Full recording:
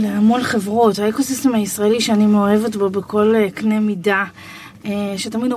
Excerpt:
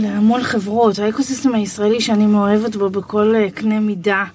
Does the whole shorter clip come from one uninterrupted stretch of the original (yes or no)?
yes